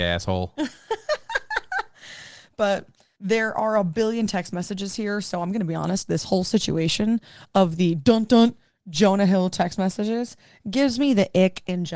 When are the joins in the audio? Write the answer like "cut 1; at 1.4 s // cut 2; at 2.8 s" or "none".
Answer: none